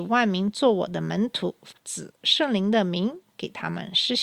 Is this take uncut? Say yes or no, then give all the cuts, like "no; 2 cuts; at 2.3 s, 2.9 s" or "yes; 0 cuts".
no; 1 cut; at 1.8 s